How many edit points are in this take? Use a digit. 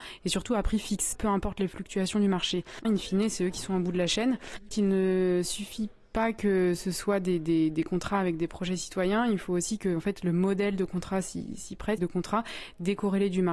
3